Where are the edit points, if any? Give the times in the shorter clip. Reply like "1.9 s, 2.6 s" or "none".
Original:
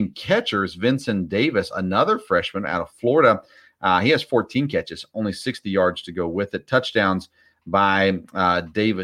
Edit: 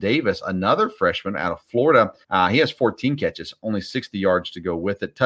2.2 s